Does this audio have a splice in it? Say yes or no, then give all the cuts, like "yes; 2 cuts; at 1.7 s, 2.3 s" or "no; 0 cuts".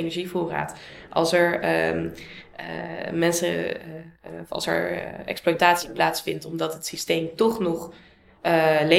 no; 0 cuts